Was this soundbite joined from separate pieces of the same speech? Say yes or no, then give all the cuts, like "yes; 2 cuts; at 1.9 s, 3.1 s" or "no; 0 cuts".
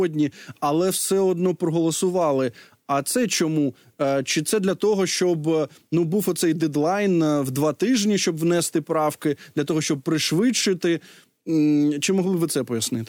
no; 0 cuts